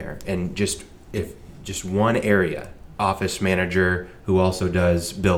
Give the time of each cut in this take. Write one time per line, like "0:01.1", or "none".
0:03.0